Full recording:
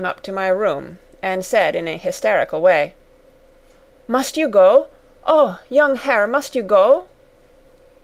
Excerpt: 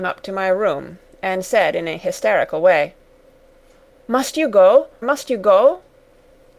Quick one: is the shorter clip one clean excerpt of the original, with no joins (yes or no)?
no